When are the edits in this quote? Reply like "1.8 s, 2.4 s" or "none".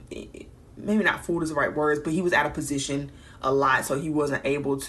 none